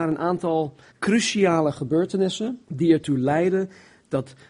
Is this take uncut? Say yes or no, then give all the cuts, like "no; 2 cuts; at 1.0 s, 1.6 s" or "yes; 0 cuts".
no; 2 cuts; at 0.9 s, 2.6 s